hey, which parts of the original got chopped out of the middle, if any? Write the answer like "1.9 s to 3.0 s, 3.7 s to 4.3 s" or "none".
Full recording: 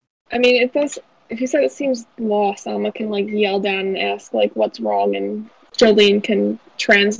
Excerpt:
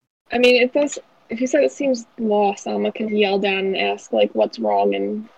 3.1 s to 3.3 s